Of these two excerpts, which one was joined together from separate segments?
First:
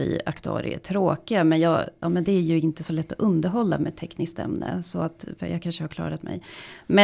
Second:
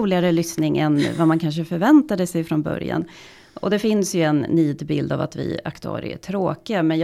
first; 1 cut; at 2.0 s

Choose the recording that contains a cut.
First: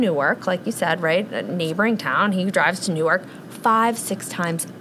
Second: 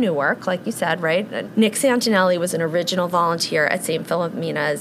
second; 1 cut; at 1.5 s

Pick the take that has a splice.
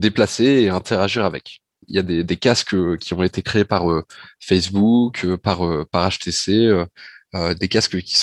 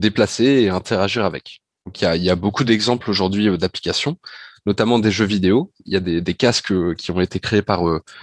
first; 1 cut; at 1.8 s

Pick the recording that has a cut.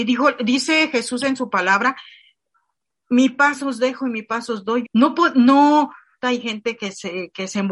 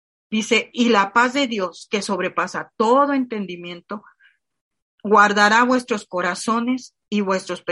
first; 2 cuts; at 4.8 s, 6.2 s

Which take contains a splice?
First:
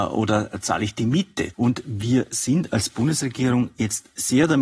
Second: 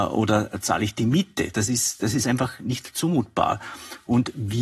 first; 1 cut; at 1.5 s

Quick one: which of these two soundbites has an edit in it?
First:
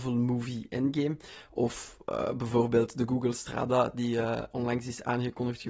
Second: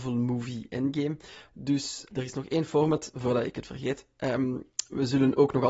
second; 1 cut; at 1.5 s

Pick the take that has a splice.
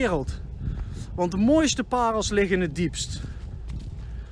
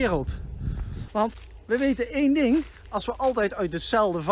second; 1 cut; at 1.1 s

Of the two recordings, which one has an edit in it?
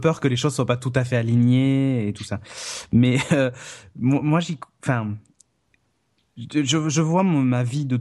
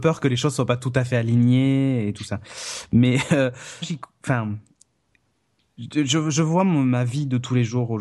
second; 1 cut; at 3.8 s

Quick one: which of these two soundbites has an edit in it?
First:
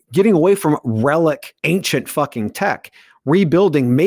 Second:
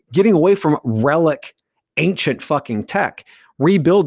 first; 1 cut; at 1.6 s

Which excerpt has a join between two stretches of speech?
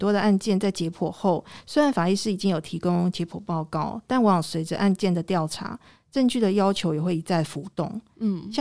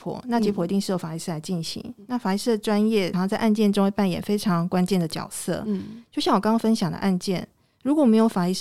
second; 1 cut; at 3.1 s

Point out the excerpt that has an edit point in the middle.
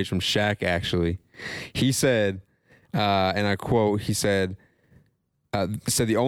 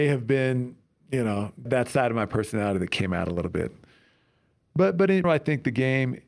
second; 2 cuts; at 1.7 s, 5.2 s

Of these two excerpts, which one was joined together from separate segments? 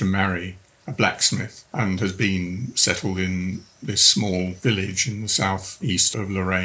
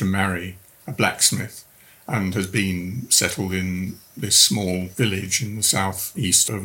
first; 1 cut; at 1.7 s

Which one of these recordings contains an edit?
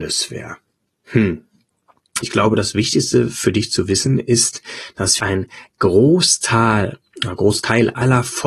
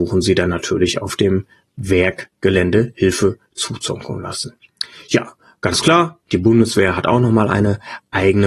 first; 2 cuts; at 2.2 s, 5.2 s

